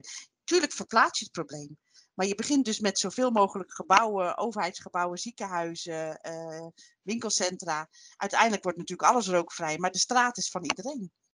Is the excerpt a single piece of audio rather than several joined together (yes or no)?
yes